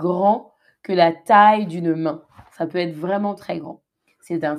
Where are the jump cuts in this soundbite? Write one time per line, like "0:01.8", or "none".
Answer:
none